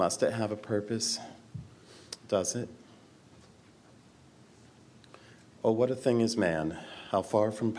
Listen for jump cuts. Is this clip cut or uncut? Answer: uncut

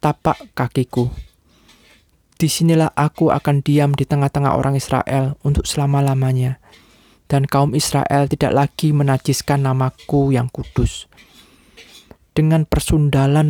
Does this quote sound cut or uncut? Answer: cut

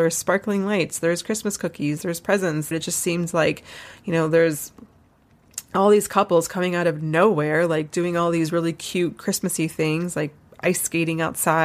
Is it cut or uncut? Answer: cut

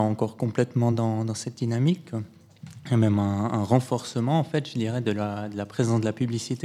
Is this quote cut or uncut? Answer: uncut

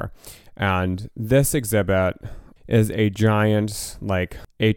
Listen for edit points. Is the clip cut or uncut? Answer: cut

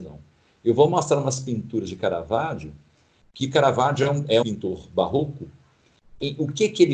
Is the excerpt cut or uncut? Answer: cut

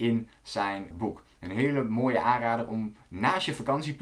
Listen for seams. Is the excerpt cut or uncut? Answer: cut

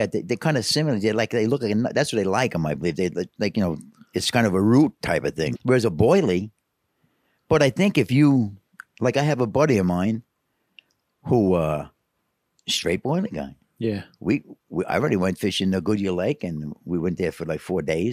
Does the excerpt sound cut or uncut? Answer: cut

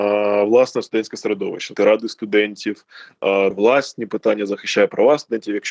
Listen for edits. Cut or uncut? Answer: cut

